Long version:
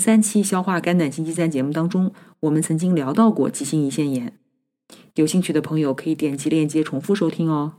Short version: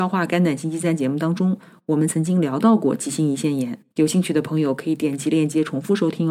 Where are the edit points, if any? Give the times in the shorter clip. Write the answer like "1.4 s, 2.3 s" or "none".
3.9 s